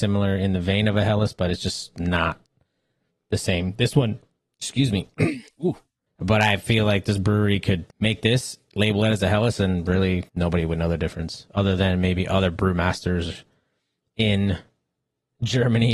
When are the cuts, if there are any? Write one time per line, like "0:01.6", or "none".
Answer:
0:06.1
0:07.9
0:10.3